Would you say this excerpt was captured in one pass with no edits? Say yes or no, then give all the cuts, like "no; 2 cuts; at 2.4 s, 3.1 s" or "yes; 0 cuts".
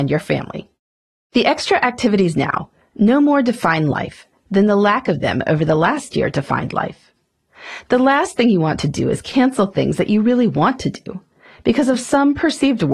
yes; 0 cuts